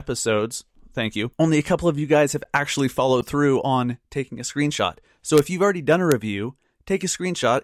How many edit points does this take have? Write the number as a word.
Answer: zero